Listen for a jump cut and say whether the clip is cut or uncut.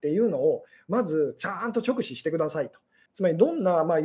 cut